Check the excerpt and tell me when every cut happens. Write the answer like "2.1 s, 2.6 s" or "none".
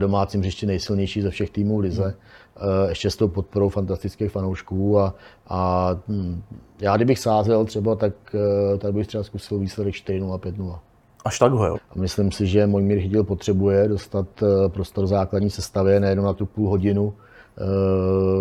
11.7 s